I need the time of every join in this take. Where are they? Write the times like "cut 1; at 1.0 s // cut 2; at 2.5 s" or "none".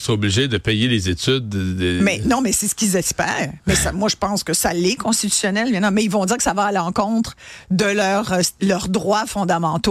none